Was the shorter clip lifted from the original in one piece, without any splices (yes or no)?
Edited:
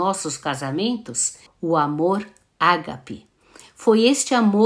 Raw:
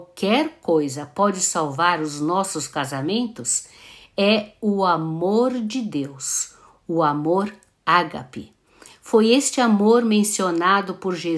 no